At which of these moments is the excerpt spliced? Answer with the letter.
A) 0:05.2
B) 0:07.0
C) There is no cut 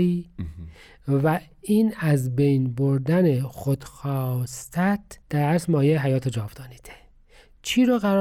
A